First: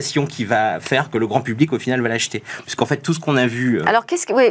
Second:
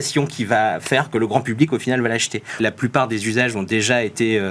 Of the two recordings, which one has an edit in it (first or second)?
second